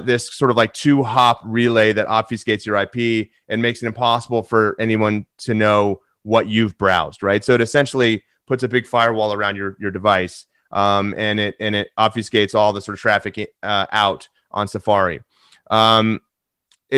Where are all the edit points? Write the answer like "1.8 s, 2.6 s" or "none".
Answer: none